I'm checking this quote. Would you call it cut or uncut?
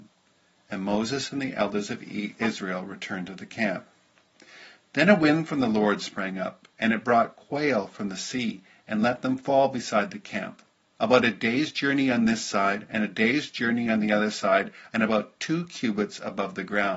cut